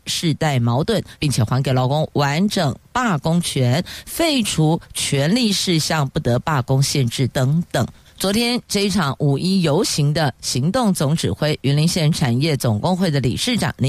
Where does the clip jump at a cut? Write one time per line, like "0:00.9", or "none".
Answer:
0:01.2
0:07.3